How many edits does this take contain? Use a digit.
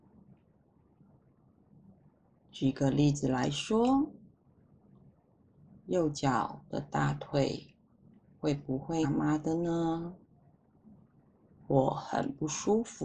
2